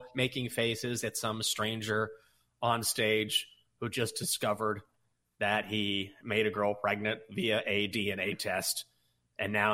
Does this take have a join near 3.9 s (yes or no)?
no